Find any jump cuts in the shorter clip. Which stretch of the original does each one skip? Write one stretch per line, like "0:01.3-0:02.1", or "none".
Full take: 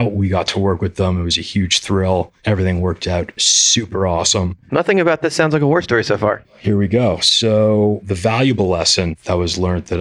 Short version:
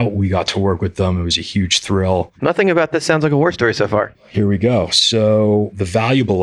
0:02.3-0:04.6